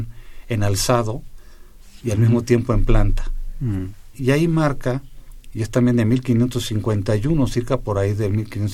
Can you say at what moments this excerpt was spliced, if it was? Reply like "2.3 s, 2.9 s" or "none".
4.1 s

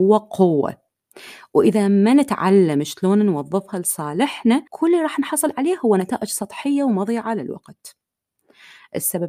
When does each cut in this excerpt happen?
4.7 s

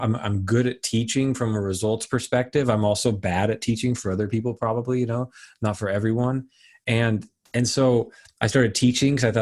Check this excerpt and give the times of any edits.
none

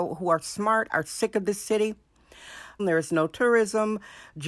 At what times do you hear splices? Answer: 2.8 s

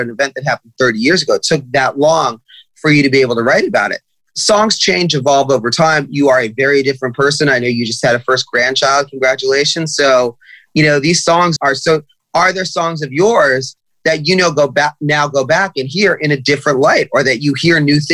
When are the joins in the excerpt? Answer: 11.6 s

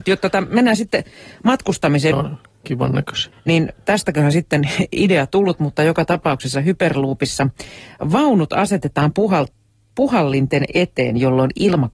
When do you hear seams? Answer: 2.1 s, 3.3 s

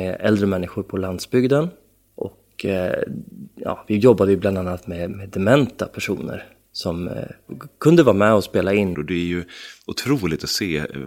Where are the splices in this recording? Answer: 8.9 s

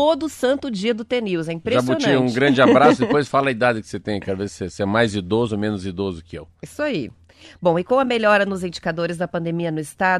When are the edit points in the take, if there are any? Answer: none

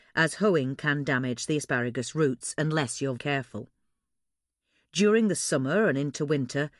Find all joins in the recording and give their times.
3.2 s

